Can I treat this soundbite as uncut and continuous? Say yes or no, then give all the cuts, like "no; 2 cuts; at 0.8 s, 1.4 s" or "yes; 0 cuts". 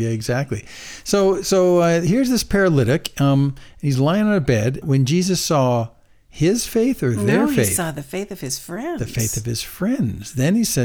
no; 1 cut; at 4.8 s